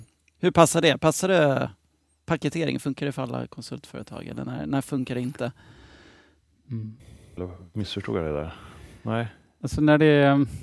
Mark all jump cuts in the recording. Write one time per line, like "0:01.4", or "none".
0:07.4
0:09.6